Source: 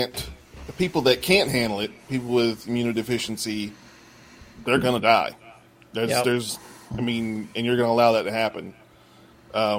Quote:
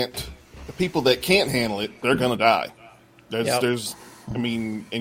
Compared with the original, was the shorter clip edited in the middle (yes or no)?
yes